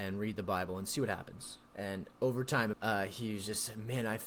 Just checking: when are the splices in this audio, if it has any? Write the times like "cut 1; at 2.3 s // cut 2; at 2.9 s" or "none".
cut 1; at 1.7 s // cut 2; at 2.7 s